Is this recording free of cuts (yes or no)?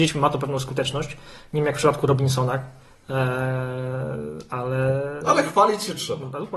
yes